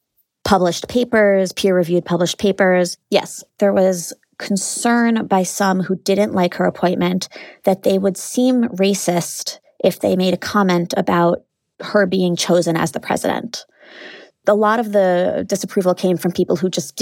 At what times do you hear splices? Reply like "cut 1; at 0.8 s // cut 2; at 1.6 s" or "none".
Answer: cut 1; at 3.0 s